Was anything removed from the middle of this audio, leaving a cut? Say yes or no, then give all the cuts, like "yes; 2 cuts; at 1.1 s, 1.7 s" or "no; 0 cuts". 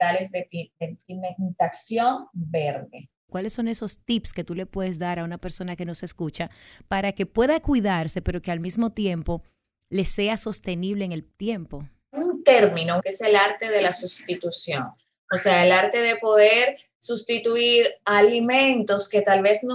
yes; 2 cuts; at 3.3 s, 13.0 s